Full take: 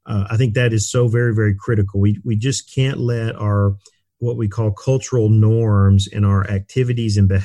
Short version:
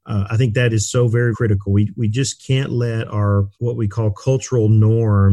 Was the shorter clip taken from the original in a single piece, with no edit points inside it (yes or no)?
no